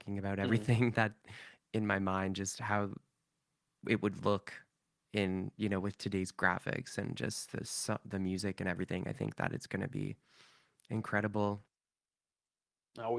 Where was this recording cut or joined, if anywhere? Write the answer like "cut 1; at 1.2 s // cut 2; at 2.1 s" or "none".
cut 1; at 1.6 s